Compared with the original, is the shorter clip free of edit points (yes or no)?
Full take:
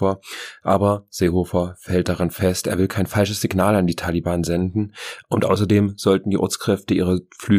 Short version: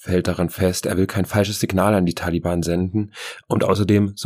yes